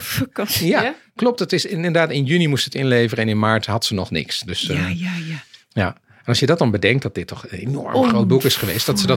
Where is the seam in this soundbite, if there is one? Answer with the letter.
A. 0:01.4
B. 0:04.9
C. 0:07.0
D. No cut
D